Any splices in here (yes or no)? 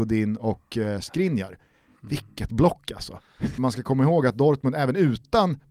yes